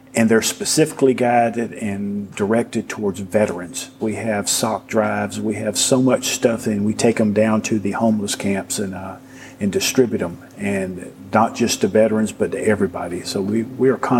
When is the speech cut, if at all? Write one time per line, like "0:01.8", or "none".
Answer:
0:04.0